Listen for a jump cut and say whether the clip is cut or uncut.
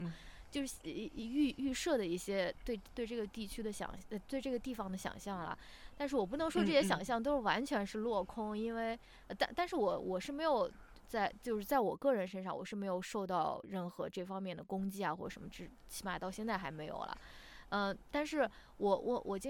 uncut